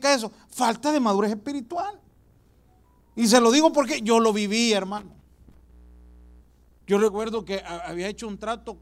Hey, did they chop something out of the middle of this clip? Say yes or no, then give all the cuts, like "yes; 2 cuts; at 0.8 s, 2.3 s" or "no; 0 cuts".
no; 0 cuts